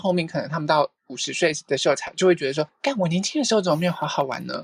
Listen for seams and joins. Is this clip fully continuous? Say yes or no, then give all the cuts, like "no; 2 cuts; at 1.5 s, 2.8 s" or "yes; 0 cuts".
yes; 0 cuts